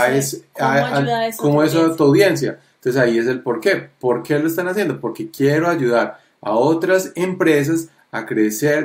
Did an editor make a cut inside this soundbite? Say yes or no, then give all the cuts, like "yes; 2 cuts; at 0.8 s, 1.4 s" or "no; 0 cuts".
no; 0 cuts